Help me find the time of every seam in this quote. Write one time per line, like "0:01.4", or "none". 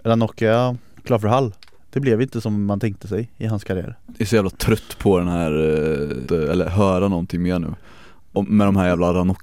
0:06.2